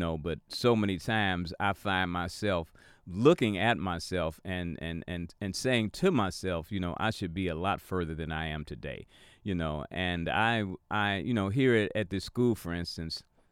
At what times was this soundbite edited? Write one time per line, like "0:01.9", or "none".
none